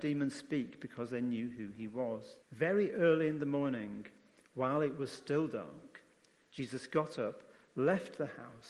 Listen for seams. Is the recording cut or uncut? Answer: cut